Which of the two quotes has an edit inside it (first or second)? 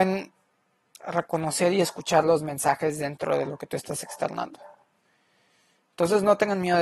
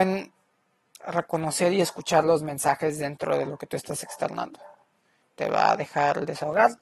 second